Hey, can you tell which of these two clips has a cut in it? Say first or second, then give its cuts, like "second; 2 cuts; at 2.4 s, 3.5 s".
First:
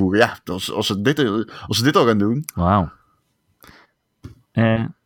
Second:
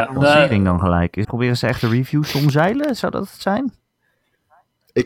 second; 1 cut; at 1.2 s